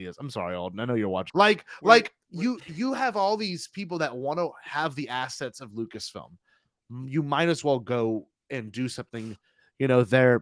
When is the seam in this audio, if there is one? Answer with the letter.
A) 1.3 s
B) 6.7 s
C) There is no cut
A